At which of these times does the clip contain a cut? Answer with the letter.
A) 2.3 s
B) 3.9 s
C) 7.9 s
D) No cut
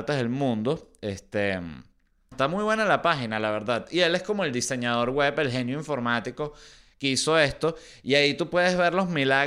A